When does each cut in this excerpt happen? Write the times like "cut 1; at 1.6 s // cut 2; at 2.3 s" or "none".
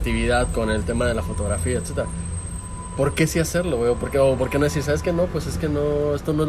none